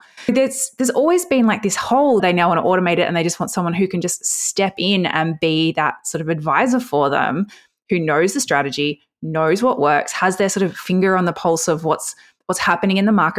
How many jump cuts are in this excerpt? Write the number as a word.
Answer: one